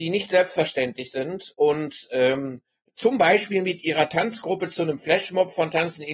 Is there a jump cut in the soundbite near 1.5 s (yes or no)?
yes